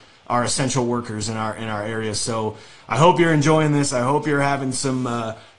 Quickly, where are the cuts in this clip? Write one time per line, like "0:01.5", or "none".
none